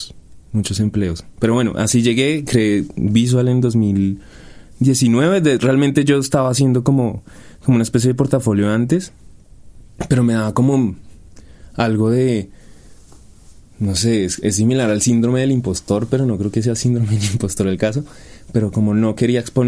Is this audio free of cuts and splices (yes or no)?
yes